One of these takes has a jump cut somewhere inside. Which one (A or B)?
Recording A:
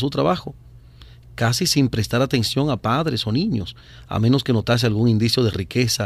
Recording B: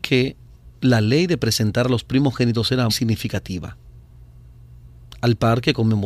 B